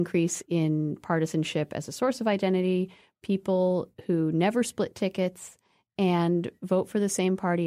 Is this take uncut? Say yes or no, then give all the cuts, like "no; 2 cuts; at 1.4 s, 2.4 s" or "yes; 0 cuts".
no; 1 cut; at 3.2 s